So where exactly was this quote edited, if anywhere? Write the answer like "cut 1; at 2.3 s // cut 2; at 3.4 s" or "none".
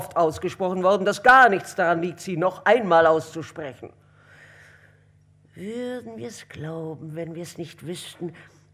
none